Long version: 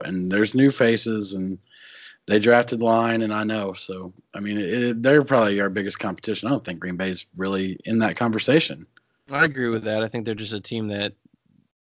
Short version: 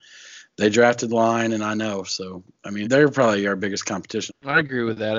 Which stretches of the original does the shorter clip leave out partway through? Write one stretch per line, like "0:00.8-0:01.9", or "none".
0:04.5-0:05.0
0:06.4-0:09.1